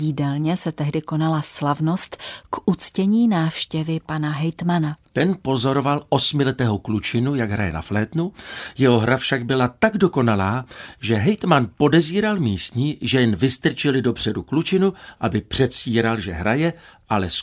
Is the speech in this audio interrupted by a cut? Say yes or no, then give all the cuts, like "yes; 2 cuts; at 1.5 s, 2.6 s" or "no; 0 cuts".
no; 0 cuts